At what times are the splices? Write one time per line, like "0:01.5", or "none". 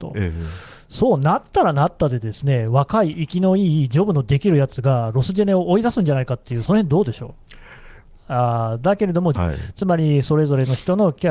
0:06.7
0:08.2
0:09.4